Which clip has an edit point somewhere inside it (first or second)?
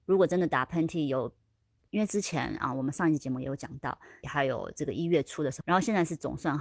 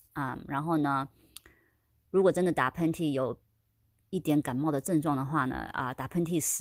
first